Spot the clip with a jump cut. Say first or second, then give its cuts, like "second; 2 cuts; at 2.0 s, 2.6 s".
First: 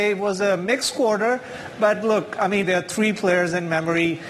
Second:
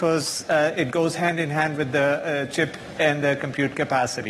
first; 1 cut; at 2.6 s